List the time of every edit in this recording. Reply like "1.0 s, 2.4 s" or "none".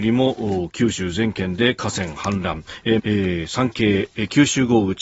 3.0 s